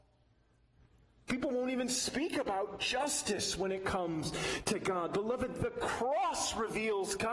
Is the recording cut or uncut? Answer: cut